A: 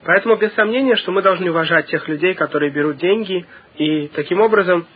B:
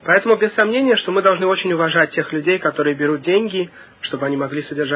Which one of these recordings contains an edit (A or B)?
A